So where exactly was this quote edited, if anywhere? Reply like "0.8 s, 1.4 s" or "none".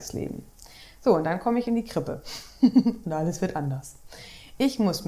none